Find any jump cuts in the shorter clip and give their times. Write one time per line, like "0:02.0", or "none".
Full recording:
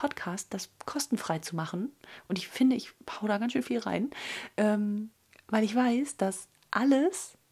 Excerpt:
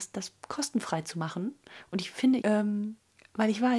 0:02.4